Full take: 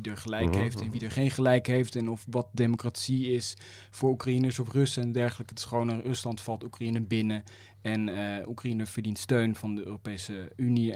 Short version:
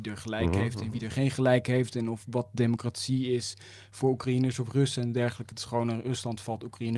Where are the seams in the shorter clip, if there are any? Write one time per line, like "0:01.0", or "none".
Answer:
none